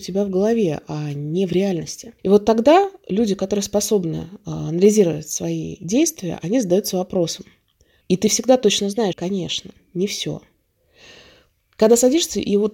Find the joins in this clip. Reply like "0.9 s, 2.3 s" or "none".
2.2 s, 8.0 s, 9.1 s